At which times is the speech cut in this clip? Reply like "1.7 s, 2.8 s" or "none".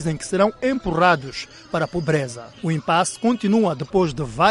2.5 s